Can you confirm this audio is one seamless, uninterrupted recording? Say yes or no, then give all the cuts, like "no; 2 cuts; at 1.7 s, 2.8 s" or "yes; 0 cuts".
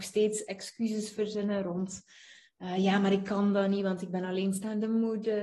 yes; 0 cuts